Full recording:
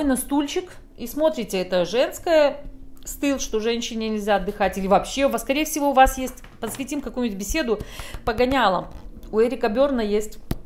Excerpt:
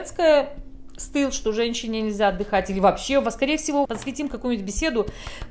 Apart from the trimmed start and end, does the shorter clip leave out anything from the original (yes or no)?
yes